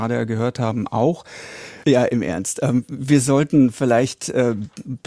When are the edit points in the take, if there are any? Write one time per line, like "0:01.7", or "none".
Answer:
0:01.8